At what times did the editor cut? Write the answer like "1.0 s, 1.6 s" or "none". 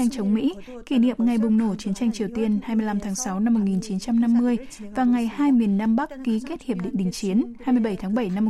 none